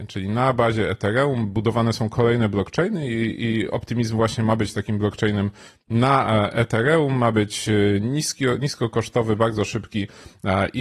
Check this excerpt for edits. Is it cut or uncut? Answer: uncut